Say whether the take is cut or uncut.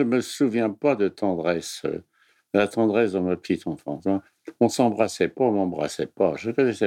uncut